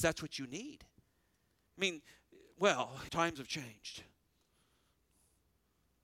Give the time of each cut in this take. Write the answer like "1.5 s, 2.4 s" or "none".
1.7 s, 3.1 s